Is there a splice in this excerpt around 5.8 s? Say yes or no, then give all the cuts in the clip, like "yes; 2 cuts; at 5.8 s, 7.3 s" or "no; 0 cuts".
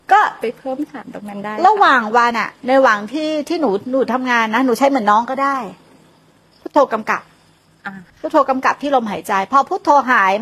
no; 2 cuts; at 2.3 s, 8.1 s